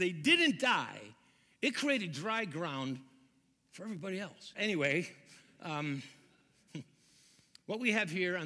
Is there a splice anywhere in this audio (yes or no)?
yes